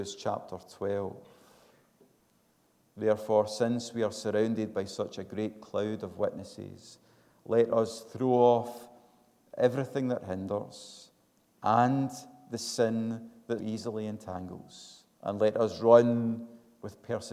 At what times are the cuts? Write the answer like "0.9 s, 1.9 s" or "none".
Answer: 13.6 s, 15.1 s